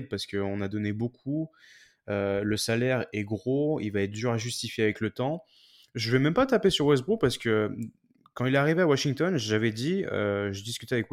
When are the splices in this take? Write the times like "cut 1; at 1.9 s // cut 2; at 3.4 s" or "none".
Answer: none